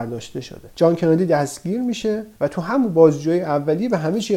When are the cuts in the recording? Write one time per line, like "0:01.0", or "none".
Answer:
0:02.4